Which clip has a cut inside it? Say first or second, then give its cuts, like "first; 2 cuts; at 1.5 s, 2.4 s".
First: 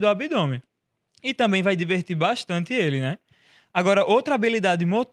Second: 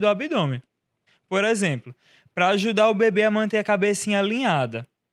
second; 1 cut; at 1.1 s